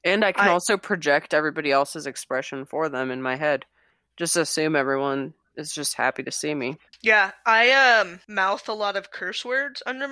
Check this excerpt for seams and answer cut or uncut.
uncut